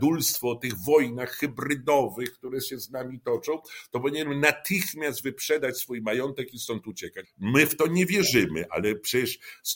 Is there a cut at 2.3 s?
no; 1 cut; at 7.2 s

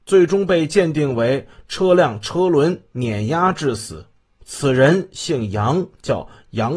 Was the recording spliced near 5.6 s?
no; 1 cut; at 4.4 s

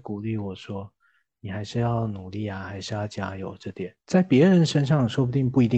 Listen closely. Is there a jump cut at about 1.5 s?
no; 1 cut; at 4.0 s

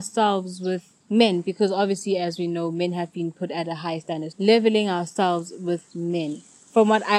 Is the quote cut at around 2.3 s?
no; 2 cuts; at 1.0 s, 4.3 s

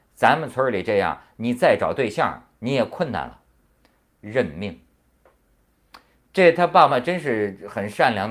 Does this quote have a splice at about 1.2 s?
no; 2 cuts; at 4.0 s, 6.9 s

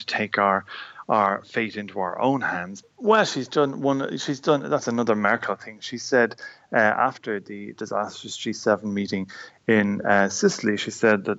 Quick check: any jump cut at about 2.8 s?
yes; 1 cut; at 2.8 s

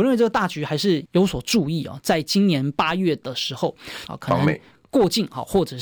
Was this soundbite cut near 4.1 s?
yes; 2 cuts; at 1.1 s, 4.1 s

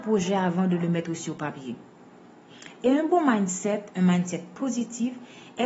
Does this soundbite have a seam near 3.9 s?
no; 0 cuts

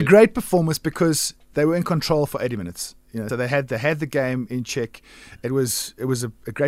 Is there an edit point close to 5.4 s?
no; 1 cut; at 3.3 s

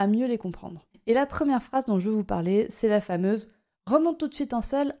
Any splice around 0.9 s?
yes; 1 cut; at 0.9 s

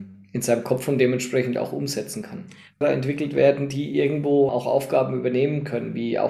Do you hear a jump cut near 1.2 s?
no; 2 cuts; at 2.8 s, 4.5 s

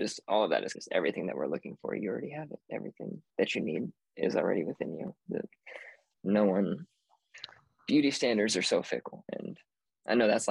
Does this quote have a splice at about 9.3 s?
yes; 2 cuts; at 5.3 s, 9.3 s

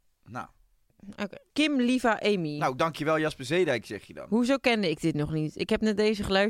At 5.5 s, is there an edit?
no; 1 cut; at 1.5 s

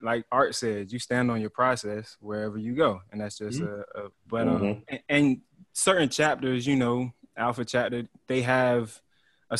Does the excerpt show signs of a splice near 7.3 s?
no; 1 cut; at 4.1 s

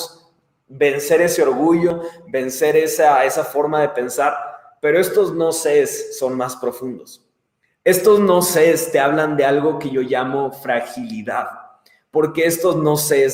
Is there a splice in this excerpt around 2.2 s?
no; 0 cuts

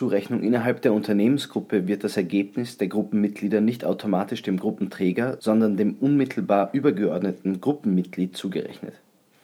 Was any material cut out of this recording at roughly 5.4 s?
no; 0 cuts

